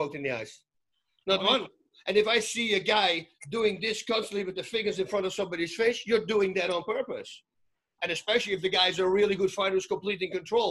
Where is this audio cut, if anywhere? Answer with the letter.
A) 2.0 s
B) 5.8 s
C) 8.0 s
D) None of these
C